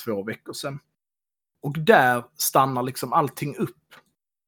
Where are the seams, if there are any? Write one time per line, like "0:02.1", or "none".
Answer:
0:01.4

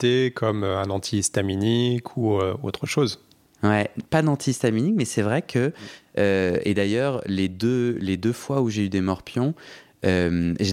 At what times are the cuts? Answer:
none

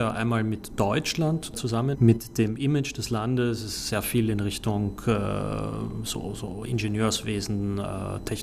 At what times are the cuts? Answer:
0:01.9

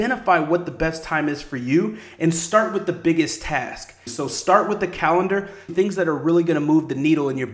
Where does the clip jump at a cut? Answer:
0:04.1
0:05.7

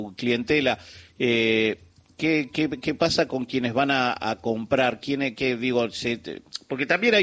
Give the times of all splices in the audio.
none

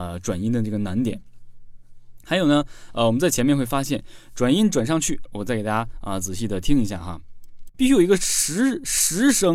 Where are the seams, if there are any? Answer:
0:05.3
0:07.7

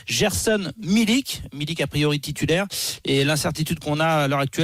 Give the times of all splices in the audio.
none

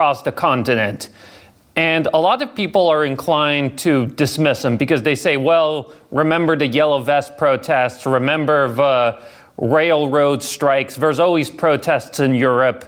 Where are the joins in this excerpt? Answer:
none

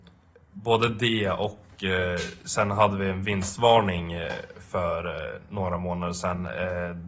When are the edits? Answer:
none

